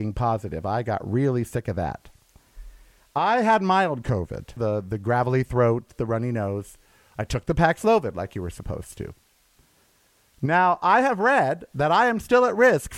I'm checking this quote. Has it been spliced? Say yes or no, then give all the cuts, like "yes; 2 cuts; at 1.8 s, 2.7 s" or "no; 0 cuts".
yes; 1 cut; at 4.6 s